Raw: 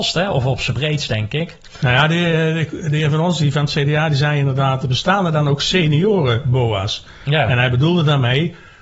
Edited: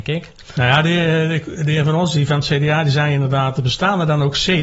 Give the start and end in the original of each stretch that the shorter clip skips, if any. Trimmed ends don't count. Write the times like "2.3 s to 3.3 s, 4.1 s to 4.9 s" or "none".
none